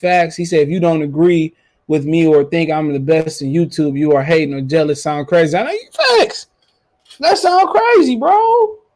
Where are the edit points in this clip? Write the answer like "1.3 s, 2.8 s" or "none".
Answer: none